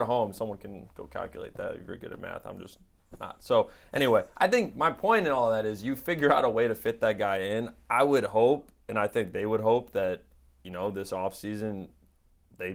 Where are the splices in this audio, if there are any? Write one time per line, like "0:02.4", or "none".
none